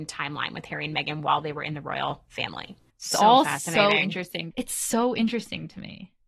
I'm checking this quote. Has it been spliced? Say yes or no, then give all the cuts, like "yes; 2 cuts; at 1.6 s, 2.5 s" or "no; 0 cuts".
yes; 2 cuts; at 2.9 s, 4.5 s